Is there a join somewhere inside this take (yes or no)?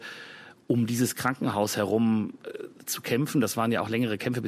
no